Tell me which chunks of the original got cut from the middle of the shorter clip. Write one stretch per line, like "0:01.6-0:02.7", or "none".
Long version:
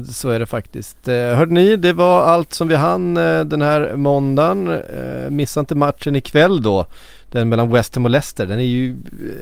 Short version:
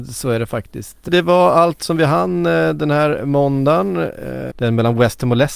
0:01.1-0:01.8
0:05.2-0:07.2

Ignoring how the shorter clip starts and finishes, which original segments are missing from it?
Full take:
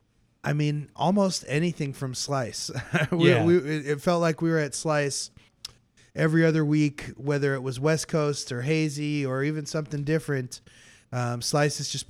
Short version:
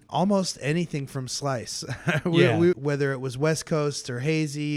0:03.6-0:07.1

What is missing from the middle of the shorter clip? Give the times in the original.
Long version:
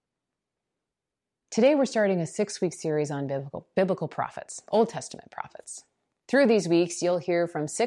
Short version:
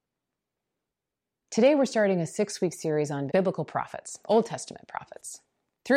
0:03.3-0:03.7

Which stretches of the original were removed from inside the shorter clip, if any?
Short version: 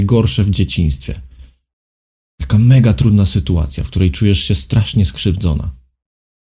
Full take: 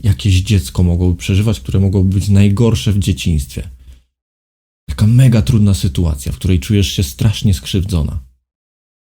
none

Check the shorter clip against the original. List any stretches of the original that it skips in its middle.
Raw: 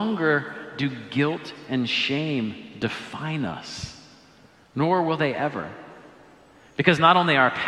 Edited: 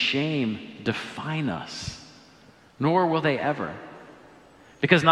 none

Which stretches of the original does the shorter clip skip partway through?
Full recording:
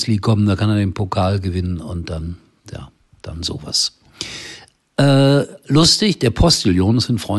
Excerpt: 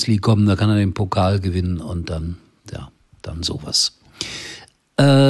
none

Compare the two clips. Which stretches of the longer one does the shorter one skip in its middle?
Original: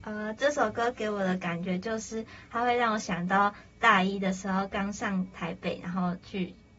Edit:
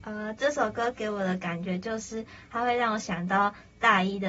none

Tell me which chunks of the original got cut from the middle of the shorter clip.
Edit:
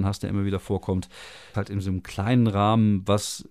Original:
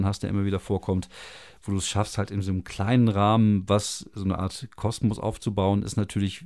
0:01.5-0:02.2

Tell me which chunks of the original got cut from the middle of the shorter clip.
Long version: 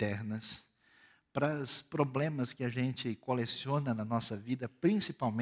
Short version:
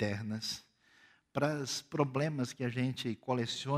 none

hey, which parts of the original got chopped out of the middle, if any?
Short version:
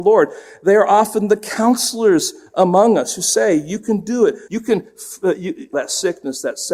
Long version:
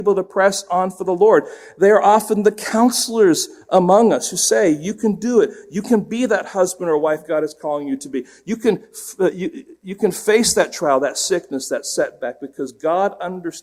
0:05.6-0:08.4
0:09.7-0:11.0

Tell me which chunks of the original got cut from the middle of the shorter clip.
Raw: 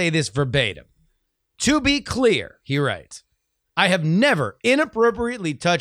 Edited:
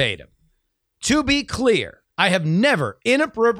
0:02.6-0:03.6

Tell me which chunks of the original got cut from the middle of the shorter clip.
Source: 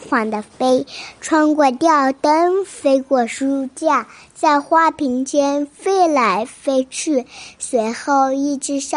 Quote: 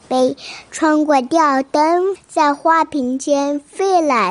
0:02.7-0:04.2

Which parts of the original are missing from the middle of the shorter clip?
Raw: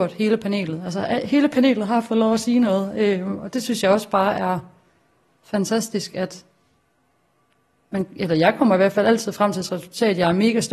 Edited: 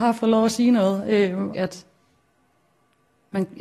0:03.4-0:06.1

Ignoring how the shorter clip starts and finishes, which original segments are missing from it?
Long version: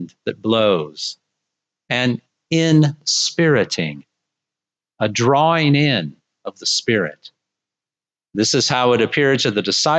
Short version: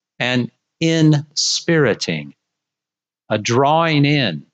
none

